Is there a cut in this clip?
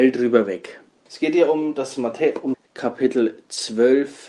yes; 2 cuts; at 1.1 s, 2.5 s

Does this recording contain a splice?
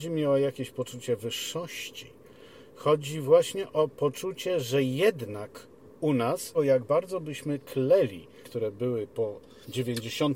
yes; 2 cuts; at 6.5 s, 8.4 s

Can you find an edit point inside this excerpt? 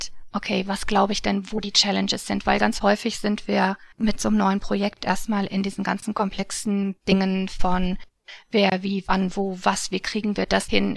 yes; 1 cut; at 3.9 s

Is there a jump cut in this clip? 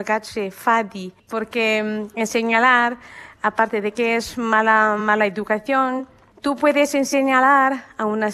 no; 0 cuts

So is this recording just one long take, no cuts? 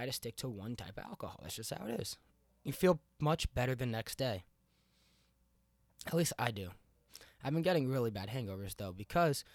yes; 0 cuts

